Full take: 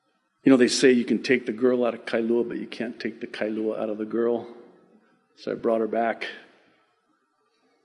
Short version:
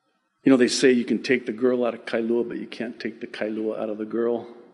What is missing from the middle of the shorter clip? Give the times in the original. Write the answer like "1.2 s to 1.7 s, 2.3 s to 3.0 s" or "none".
none